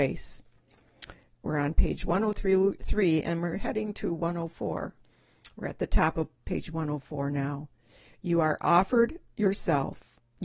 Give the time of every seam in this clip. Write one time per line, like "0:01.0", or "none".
none